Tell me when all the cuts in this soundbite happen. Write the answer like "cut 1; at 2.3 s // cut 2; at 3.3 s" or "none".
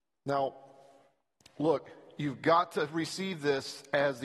none